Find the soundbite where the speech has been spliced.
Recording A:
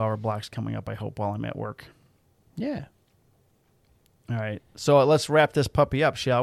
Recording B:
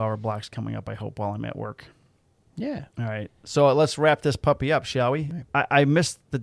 B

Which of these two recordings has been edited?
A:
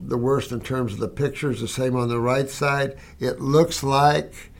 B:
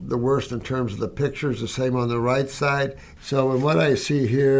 B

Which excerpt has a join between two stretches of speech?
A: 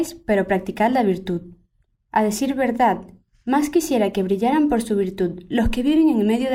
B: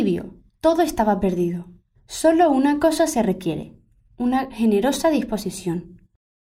B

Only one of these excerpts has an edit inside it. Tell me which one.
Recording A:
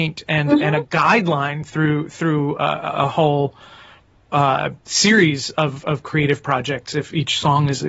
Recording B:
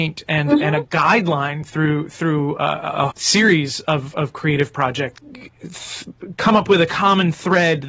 B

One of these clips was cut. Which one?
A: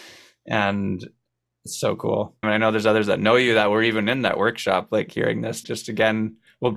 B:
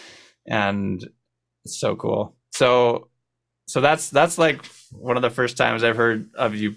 A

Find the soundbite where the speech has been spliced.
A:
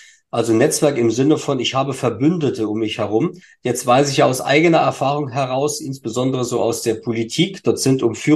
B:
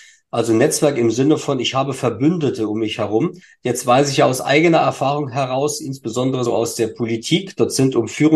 B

